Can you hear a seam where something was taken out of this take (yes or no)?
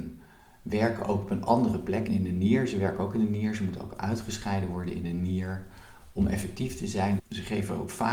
yes